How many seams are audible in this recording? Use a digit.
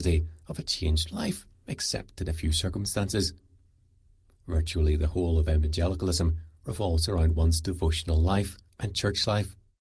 1